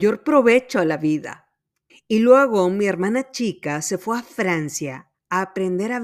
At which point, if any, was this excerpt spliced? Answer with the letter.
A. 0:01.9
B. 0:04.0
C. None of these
A